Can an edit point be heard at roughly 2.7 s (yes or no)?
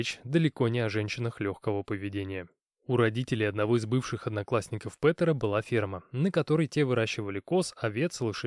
no